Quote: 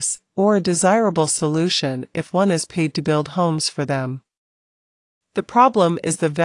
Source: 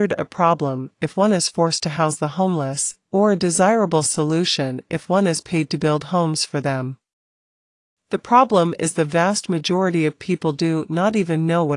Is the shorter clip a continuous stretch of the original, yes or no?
yes